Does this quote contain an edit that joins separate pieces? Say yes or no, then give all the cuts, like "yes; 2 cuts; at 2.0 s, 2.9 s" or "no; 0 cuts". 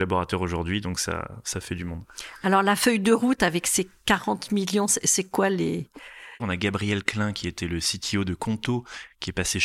yes; 1 cut; at 6.4 s